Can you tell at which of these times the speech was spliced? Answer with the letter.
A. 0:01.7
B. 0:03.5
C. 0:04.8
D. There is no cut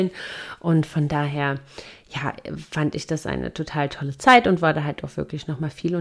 D